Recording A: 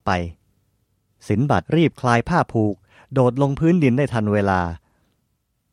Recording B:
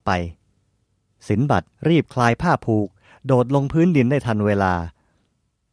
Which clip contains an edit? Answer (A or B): A